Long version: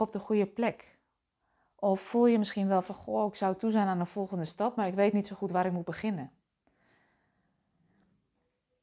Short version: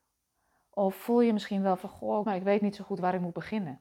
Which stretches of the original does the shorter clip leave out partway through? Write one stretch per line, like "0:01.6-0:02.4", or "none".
0:03.3-0:04.7